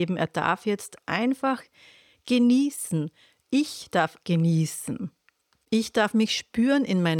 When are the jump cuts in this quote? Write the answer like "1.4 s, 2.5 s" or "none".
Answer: 4.2 s